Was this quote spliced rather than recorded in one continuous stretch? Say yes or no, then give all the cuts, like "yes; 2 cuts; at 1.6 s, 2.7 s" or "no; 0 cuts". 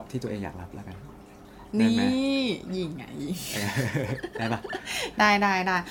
no; 0 cuts